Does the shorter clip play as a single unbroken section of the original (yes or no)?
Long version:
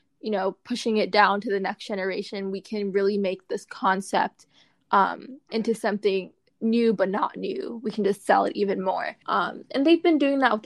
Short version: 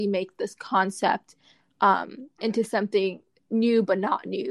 yes